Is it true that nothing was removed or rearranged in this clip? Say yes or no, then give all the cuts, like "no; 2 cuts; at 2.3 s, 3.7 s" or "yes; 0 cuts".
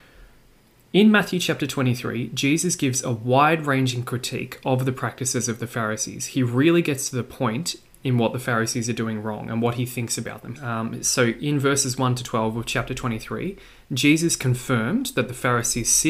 no; 1 cut; at 10.6 s